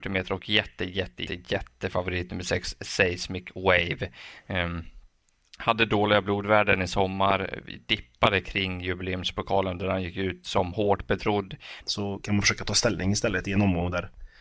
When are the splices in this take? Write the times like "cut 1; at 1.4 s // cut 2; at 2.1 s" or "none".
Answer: cut 1; at 1.3 s // cut 2; at 11.8 s